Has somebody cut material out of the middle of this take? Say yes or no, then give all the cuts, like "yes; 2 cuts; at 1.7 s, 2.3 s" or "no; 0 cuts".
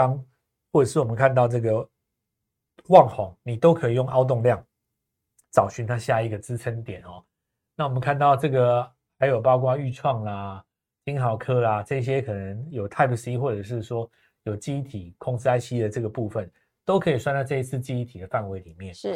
no; 0 cuts